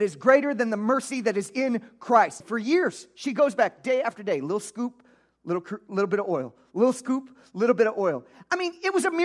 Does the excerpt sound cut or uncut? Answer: cut